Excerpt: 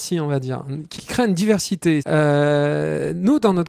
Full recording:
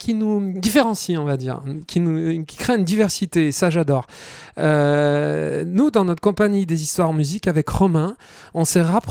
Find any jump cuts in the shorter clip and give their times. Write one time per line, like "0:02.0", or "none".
0:01.0
0:02.0